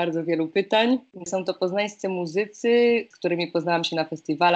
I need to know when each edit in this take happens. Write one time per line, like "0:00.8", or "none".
0:01.2